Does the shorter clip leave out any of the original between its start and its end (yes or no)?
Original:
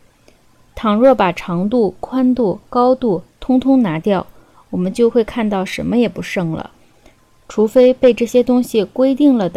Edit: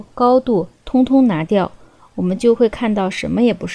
no